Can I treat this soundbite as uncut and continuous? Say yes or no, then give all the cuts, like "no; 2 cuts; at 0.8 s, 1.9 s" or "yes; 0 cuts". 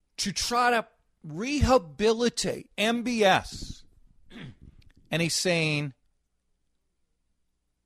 no; 1 cut; at 2.7 s